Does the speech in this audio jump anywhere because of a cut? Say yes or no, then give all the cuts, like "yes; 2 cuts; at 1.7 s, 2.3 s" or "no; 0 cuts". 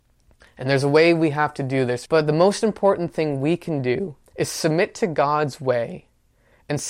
yes; 2 cuts; at 2.1 s, 4.3 s